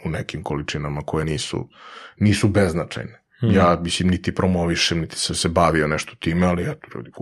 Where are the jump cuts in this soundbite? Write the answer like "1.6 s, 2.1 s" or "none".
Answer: none